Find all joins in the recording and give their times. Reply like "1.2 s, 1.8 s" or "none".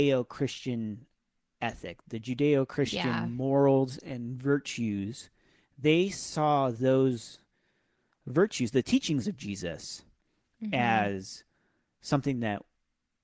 none